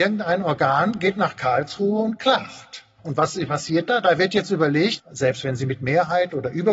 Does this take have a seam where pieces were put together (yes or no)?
yes